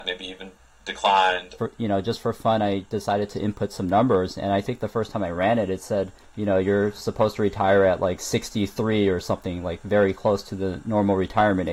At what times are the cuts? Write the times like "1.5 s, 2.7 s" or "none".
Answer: 1.6 s